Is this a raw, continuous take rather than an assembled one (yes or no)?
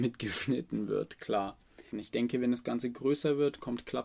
no